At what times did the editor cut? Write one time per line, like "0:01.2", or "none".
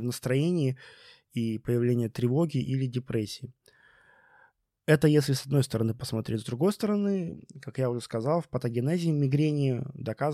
none